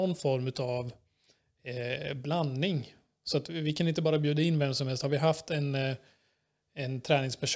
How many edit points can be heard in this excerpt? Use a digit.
0